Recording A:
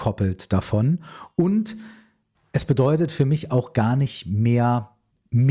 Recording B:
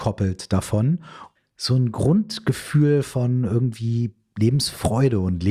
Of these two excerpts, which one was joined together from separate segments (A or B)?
B